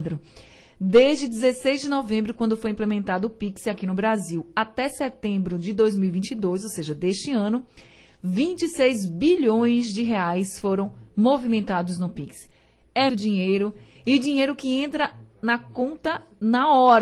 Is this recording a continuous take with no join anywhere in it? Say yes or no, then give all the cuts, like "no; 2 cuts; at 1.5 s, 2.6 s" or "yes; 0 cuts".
no; 1 cut; at 13.1 s